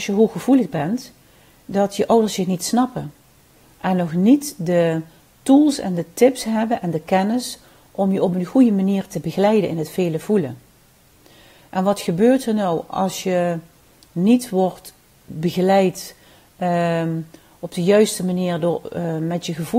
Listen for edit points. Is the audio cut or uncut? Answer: uncut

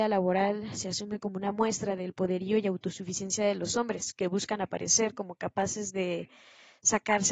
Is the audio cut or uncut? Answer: uncut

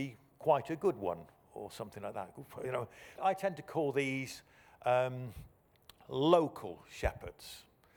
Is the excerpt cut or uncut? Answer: cut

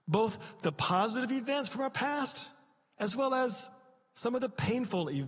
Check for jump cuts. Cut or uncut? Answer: uncut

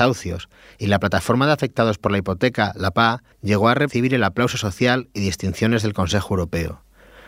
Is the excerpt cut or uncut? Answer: cut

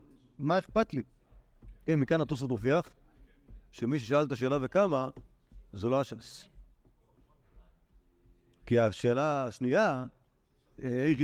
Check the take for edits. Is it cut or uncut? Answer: uncut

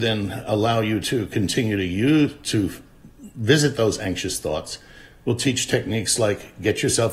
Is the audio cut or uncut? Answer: uncut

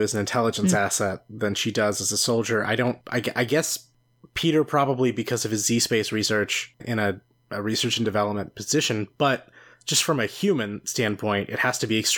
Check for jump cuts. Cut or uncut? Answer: cut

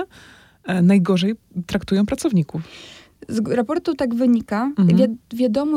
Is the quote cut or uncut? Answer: uncut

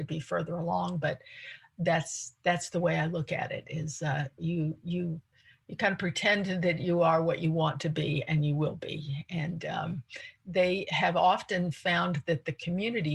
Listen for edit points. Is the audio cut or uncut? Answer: uncut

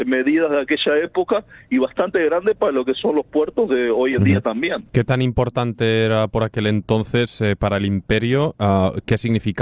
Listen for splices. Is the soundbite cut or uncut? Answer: uncut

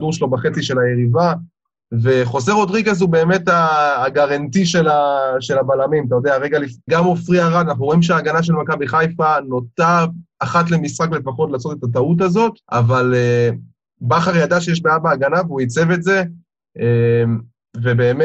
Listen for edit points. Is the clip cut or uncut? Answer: cut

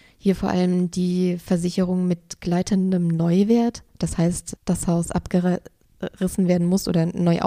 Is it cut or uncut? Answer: cut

